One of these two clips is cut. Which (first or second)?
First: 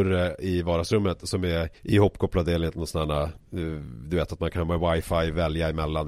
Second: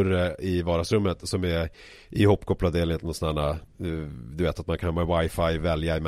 first